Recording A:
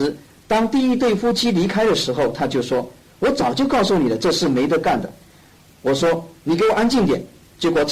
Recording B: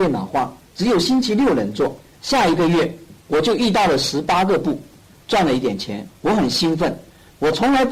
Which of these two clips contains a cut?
B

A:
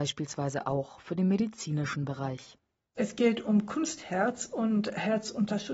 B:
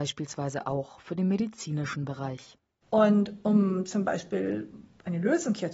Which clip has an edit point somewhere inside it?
B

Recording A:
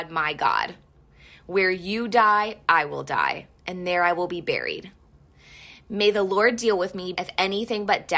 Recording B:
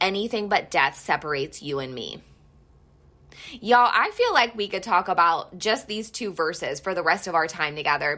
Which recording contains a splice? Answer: A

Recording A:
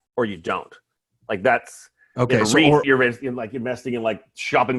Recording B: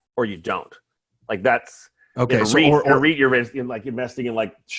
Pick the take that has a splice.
A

